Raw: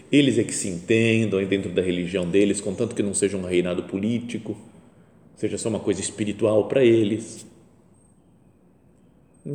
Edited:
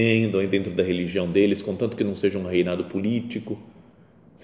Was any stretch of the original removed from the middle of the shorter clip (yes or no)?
no